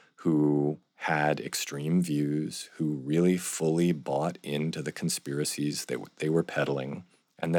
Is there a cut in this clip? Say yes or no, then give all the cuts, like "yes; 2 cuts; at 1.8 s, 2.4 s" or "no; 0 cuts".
no; 0 cuts